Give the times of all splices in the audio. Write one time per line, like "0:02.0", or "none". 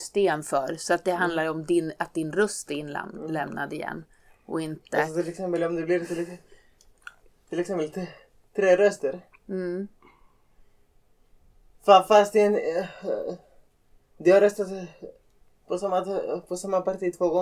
none

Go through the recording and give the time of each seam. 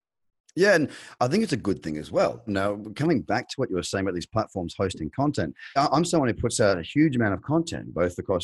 0:02.5
0:05.8

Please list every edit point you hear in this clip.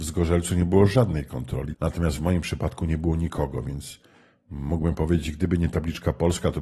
0:01.7

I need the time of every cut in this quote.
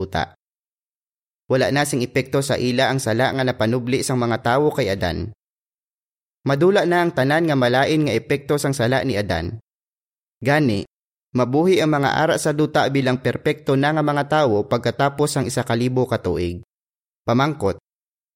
0:17.1

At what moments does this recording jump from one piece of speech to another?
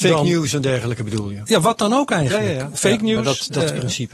none

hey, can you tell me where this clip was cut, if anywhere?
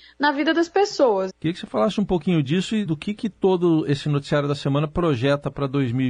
0:01.3
0:02.9

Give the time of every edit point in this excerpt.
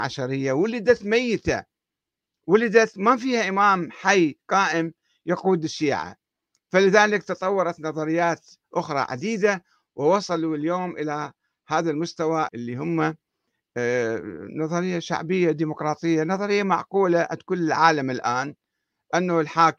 0:12.5

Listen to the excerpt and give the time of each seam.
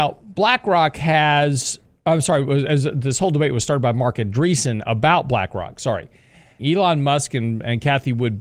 0:06.6

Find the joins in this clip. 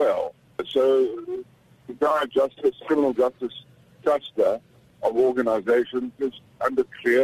none

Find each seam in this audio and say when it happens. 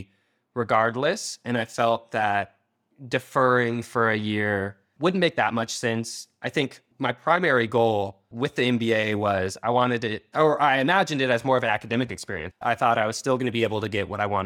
0:12.5

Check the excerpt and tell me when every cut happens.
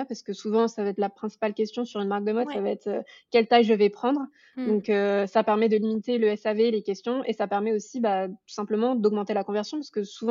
none

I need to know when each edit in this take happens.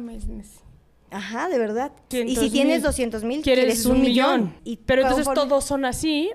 0:02.1
0:04.6

